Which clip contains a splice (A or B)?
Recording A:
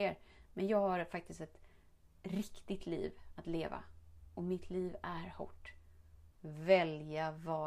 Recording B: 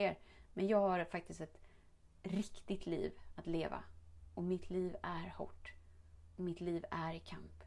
A